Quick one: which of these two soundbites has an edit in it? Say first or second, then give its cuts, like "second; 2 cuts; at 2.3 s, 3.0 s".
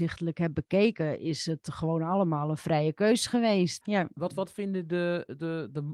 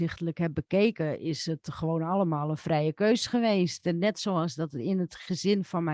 first; 1 cut; at 3.8 s